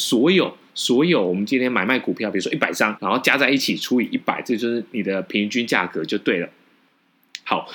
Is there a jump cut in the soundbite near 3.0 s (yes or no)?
yes